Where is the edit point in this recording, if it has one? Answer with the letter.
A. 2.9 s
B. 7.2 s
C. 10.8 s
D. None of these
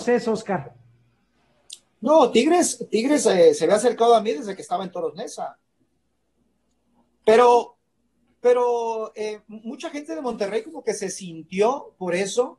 B